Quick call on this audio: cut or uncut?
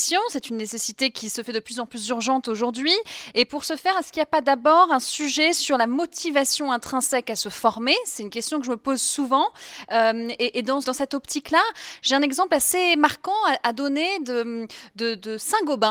cut